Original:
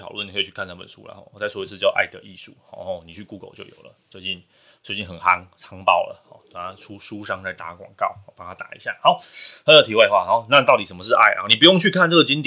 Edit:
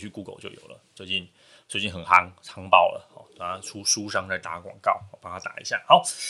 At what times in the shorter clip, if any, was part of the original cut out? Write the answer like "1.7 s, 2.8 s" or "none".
none